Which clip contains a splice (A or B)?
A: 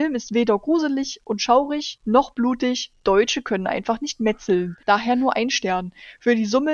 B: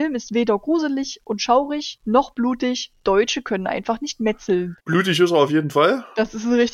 B